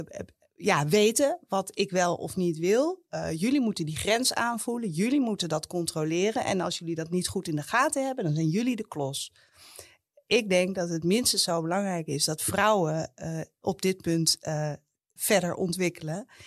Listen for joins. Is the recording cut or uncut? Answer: cut